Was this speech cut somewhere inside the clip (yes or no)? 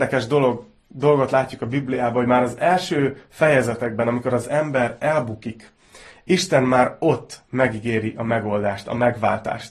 no